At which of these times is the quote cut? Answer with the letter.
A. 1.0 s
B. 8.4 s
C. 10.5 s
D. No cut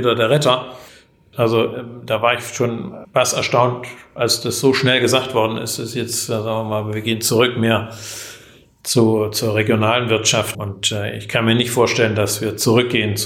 C